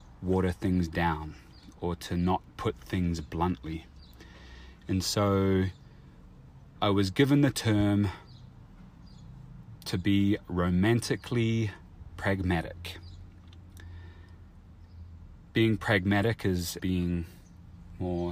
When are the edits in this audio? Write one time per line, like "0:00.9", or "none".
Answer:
0:16.8